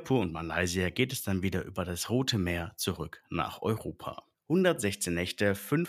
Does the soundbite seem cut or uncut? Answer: cut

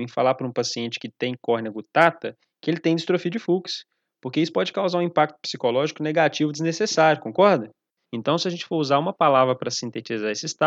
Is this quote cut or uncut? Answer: cut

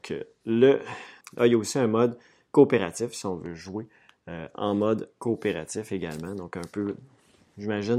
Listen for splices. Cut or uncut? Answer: cut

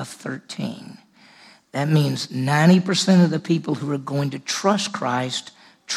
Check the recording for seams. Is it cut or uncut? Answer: uncut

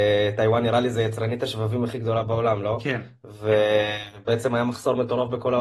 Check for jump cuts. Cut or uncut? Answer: uncut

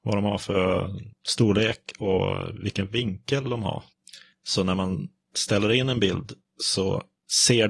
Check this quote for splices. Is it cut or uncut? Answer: uncut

